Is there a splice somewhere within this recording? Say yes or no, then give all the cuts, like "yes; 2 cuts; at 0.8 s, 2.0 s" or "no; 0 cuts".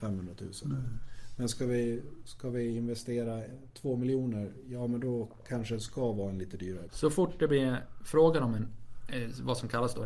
yes; 1 cut; at 6.9 s